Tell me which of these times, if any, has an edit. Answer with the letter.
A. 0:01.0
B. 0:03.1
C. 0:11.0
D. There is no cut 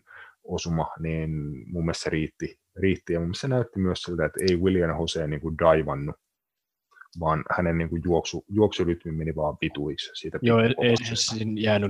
C